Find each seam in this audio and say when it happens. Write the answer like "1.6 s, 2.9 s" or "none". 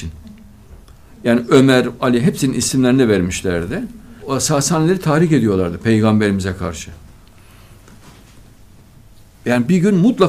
2.0 s, 4.2 s